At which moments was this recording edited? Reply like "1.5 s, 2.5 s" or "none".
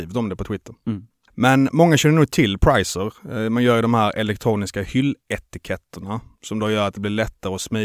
none